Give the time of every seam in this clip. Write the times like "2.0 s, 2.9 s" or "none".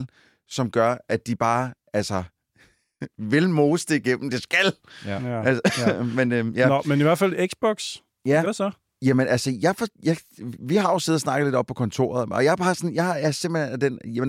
8.4 s